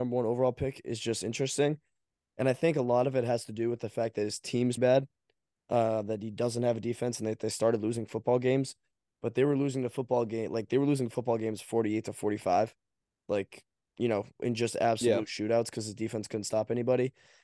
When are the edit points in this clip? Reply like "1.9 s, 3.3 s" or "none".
4.8 s